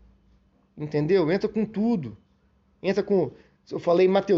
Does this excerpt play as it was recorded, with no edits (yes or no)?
yes